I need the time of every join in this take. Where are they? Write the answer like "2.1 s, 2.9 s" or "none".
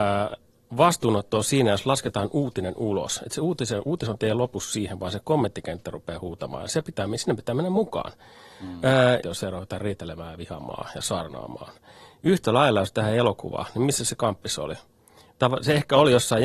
9.2 s